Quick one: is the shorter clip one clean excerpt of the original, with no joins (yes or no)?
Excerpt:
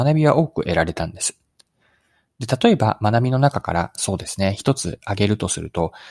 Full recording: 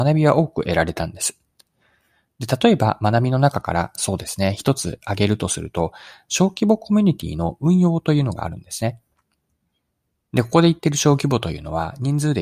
yes